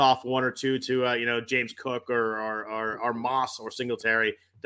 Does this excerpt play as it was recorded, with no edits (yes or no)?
yes